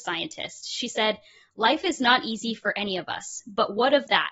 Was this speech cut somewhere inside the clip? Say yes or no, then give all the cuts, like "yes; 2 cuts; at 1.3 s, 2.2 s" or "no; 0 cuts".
no; 0 cuts